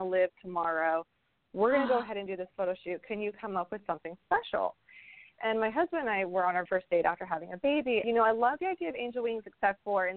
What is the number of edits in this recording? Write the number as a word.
three